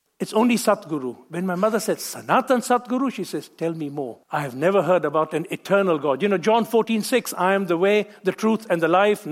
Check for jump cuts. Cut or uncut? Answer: cut